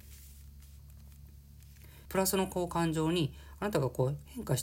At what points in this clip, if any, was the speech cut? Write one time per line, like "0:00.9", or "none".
0:02.1